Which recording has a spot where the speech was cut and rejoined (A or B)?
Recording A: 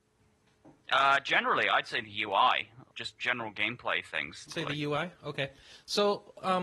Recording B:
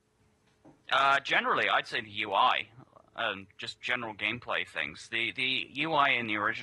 A